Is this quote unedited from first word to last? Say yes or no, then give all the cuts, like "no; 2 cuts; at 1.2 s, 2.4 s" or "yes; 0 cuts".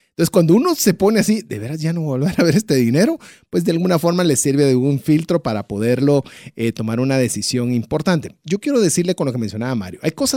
yes; 0 cuts